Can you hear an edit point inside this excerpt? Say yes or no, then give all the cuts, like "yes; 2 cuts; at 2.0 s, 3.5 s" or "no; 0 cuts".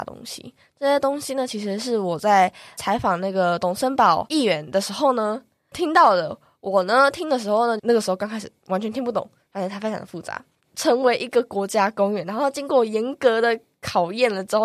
yes; 2 cuts; at 7.8 s, 10.6 s